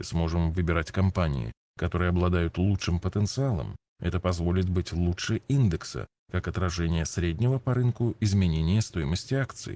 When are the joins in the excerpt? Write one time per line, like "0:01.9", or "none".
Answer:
none